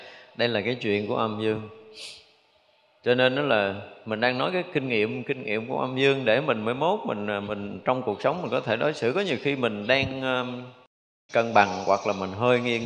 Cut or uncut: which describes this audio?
cut